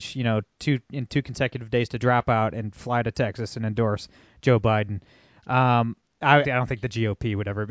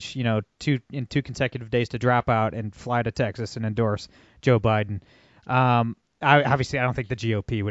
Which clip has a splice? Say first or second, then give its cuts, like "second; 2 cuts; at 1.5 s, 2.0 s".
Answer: first; 1 cut; at 6.4 s